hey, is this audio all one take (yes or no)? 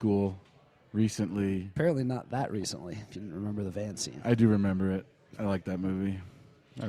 yes